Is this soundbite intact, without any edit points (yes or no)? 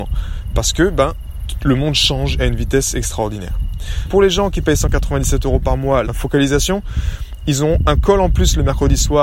no